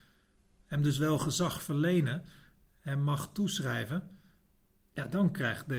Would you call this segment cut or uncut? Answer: uncut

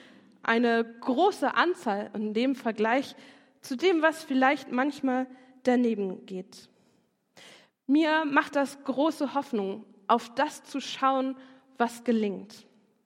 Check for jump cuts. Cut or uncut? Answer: uncut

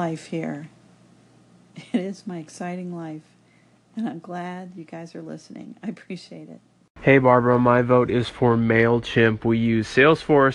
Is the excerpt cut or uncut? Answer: uncut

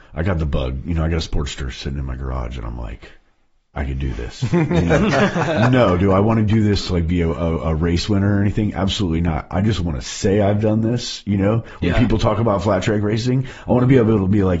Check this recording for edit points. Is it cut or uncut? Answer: uncut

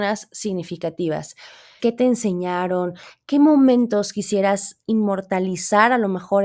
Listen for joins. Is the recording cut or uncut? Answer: cut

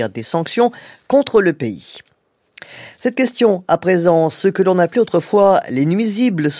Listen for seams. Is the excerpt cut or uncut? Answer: uncut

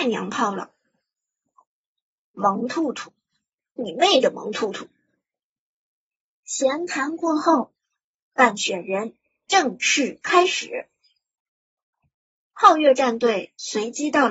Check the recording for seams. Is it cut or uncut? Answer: uncut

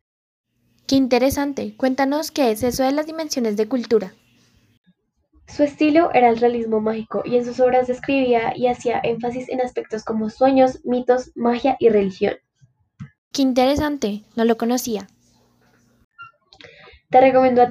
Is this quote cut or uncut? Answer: cut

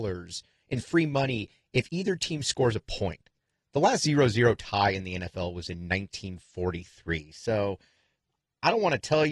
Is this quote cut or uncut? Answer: uncut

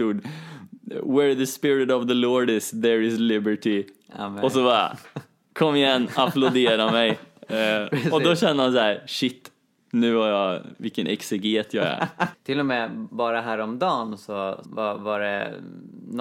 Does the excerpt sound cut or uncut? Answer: cut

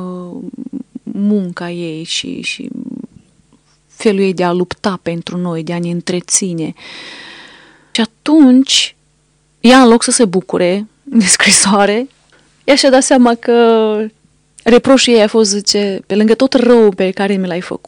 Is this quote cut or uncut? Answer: uncut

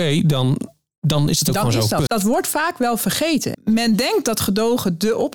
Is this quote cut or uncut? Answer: cut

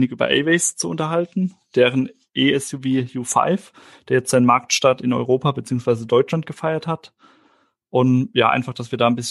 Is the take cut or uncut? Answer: uncut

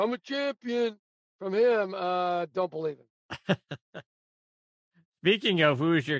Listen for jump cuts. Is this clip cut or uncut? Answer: uncut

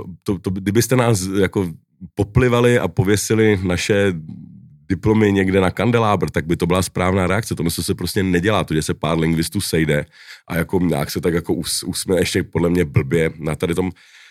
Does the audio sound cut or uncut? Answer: uncut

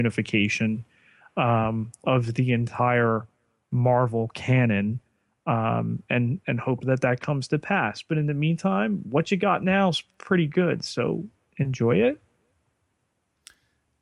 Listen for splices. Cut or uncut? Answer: uncut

